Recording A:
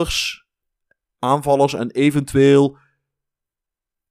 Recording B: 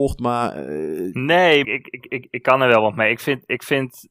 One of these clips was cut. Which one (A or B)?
B